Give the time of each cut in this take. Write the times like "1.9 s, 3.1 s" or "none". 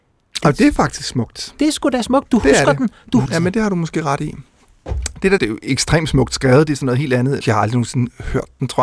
3.3 s, 5.4 s, 7.4 s